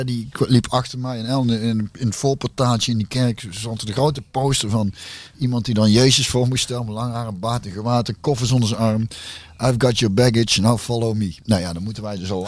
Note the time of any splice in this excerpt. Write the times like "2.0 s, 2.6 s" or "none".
none